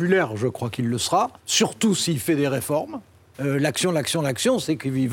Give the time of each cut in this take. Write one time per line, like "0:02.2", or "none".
0:01.4
0:03.3